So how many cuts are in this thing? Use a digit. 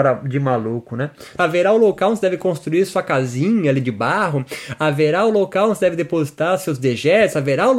1